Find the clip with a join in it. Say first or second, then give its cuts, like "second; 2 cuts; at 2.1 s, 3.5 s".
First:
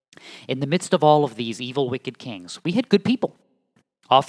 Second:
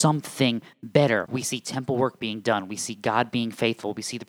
second; 1 cut; at 1.3 s